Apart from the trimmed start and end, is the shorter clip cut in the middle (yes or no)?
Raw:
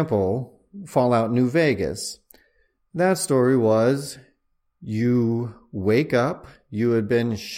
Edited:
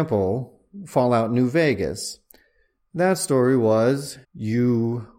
yes